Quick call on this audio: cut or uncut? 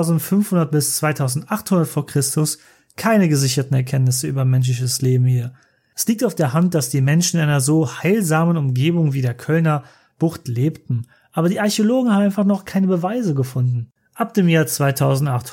cut